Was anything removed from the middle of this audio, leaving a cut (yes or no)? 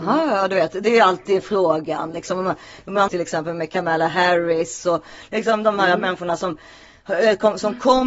yes